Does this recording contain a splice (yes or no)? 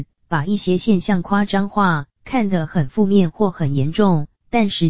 no